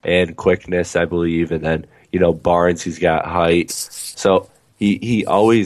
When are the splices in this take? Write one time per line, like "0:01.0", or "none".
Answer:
0:03.7